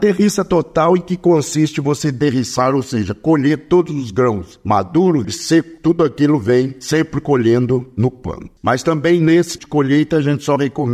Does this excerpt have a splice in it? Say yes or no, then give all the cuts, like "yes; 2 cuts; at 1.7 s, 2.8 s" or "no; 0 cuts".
yes; 3 cuts; at 5.2 s, 8.6 s, 9.6 s